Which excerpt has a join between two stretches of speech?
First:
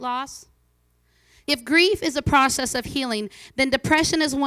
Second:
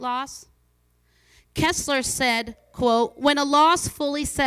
first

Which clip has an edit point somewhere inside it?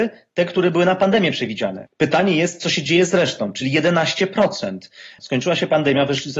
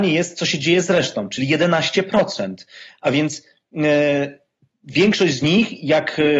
first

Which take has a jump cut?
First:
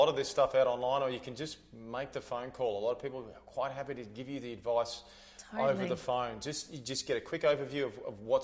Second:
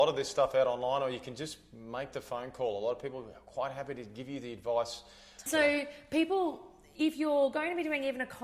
second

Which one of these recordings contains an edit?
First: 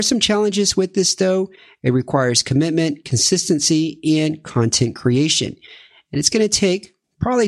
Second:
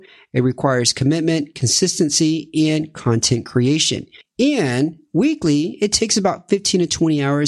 second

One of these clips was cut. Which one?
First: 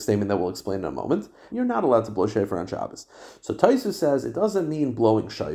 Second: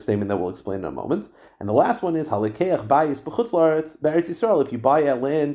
first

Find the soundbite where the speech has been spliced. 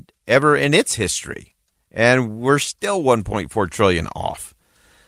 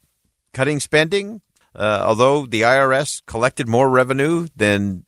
second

